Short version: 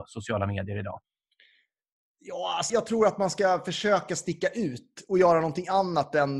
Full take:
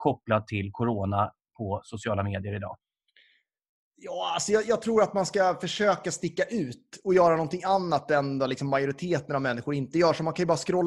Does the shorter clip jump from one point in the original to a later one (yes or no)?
yes